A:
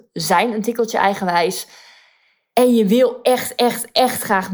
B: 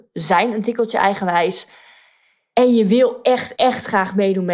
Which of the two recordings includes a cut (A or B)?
B